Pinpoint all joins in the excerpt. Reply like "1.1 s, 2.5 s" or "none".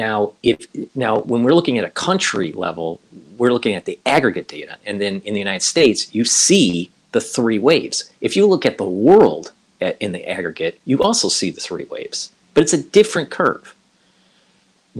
none